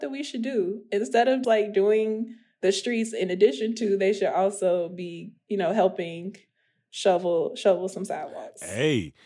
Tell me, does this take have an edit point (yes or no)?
yes